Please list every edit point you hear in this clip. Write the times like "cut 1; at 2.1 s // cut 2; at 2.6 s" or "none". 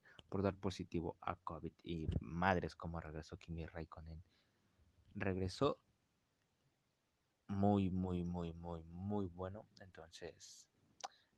none